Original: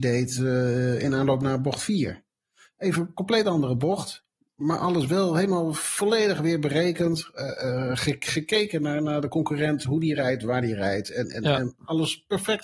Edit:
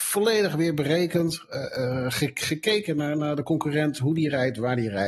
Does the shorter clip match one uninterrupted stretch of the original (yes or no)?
yes